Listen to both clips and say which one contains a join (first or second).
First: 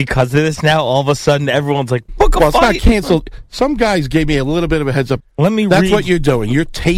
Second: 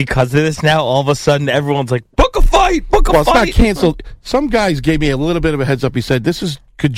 first